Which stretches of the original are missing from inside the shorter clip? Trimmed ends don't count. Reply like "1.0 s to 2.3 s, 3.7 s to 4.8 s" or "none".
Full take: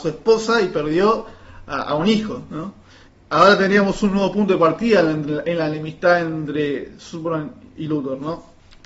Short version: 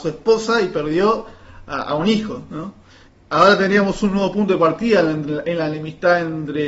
none